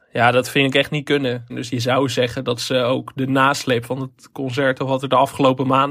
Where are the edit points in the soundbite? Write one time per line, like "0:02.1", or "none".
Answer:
0:01.5

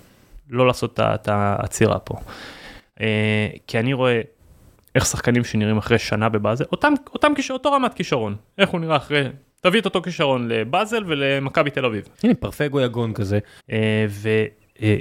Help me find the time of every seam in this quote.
0:12.1
0:13.6

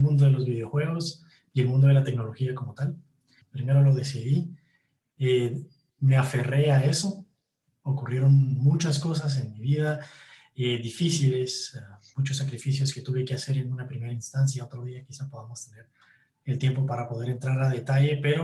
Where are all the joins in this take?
0:03.4

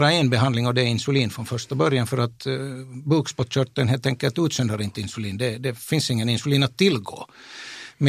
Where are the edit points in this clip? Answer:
none

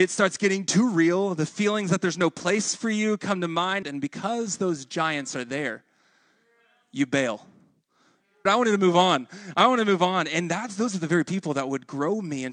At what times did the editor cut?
0:03.8
0:08.5

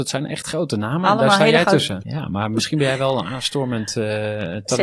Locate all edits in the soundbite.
0:02.0

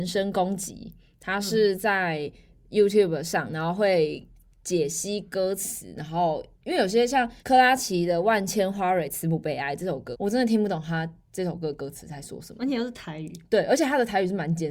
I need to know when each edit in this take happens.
0:07.4
0:10.1

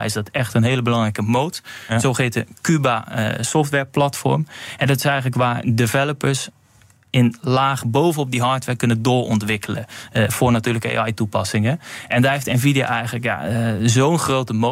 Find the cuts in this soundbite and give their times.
none

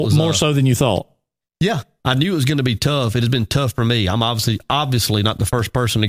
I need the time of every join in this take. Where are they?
0:02.0

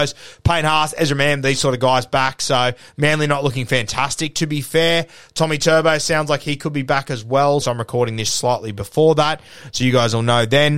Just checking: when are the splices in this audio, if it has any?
0:07.6

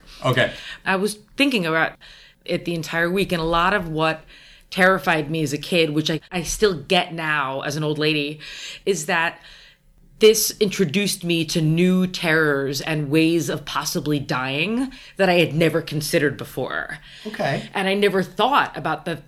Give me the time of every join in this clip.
0:06.2

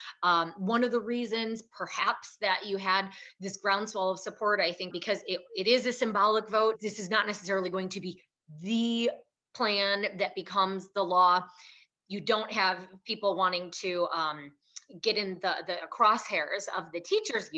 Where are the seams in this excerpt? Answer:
0:04.9

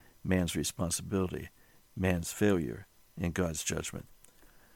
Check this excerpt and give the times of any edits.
none

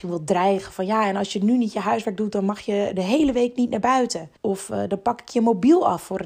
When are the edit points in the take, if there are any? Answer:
0:04.4

